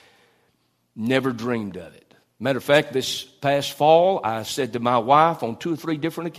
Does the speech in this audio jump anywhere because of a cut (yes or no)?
no